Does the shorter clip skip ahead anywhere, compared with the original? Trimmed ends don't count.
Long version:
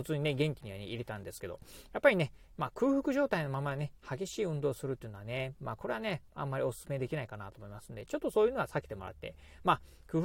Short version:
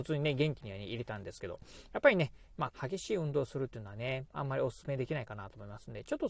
yes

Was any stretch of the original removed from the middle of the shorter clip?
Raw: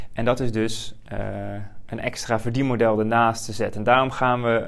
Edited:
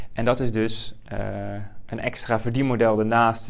no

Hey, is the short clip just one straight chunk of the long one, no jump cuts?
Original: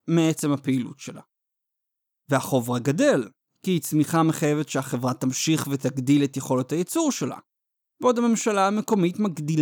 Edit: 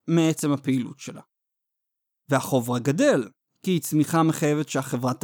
yes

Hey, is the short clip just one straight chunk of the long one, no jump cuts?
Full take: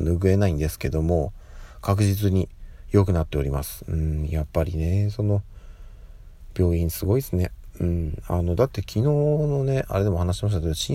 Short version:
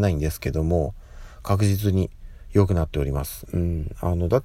no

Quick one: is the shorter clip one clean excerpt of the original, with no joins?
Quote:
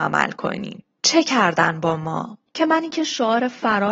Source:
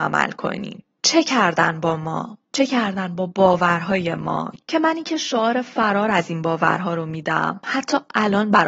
no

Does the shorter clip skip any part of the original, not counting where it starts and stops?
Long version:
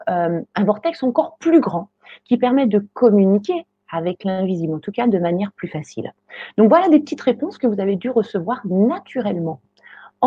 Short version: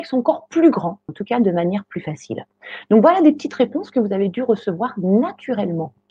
yes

